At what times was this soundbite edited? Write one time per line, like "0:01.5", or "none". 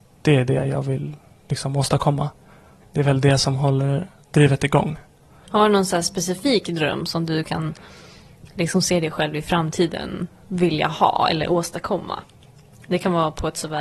0:02.8
0:05.4

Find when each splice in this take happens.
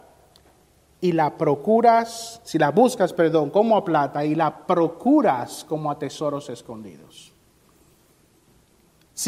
none

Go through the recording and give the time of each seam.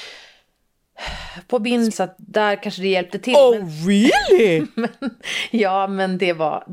0:01.9

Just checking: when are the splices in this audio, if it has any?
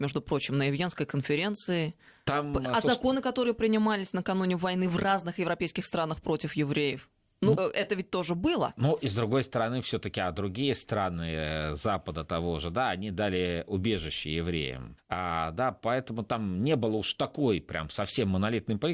0:07.6
0:15.0

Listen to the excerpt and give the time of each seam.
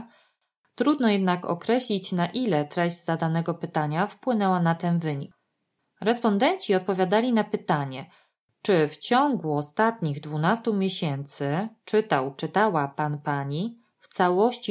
none

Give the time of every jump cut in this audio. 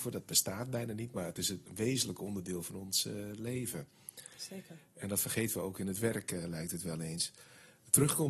none

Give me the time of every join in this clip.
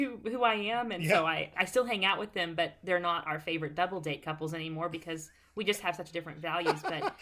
0:01.5

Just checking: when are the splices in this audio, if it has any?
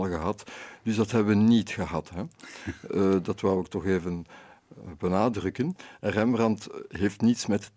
none

